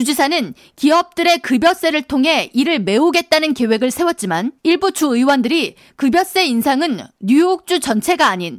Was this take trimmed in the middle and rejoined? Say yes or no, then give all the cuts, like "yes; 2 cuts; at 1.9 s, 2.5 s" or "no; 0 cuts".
yes; 1 cut; at 4.6 s